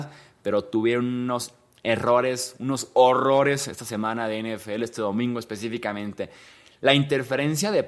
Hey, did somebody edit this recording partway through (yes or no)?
no